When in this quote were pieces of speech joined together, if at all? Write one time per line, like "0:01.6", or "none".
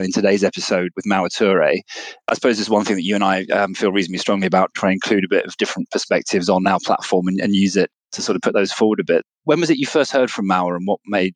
none